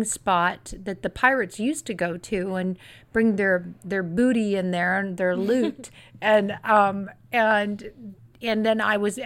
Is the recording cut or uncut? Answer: uncut